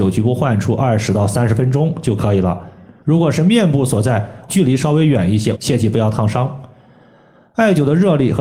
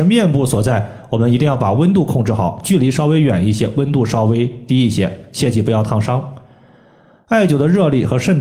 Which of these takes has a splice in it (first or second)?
first